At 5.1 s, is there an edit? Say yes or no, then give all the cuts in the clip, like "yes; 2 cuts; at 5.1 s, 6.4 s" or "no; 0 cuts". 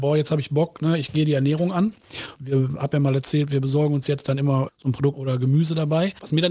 yes; 2 cuts; at 2.4 s, 5.1 s